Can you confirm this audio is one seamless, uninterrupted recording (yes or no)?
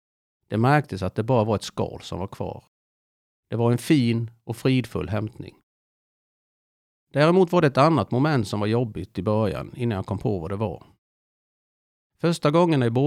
yes